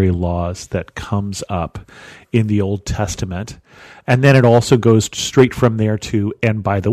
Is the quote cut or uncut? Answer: uncut